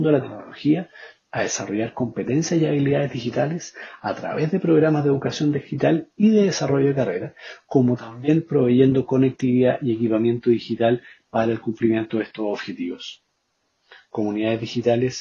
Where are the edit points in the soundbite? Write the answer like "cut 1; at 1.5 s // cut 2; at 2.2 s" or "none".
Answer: none